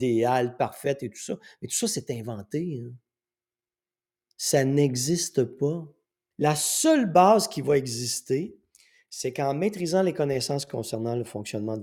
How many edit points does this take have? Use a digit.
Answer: 1